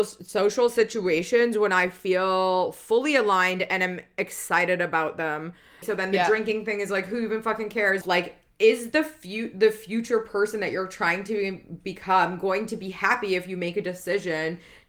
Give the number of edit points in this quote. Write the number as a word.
two